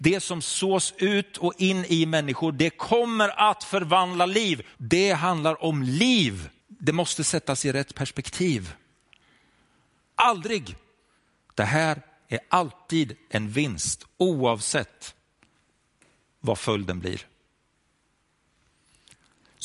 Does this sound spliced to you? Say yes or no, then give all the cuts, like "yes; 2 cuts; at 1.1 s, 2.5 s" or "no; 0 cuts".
yes; 3 cuts; at 4.7 s, 6.6 s, 10.1 s